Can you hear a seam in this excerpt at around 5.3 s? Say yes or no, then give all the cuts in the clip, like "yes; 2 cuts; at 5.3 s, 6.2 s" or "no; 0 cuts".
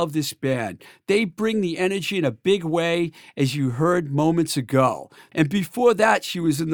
yes; 1 cut; at 5.3 s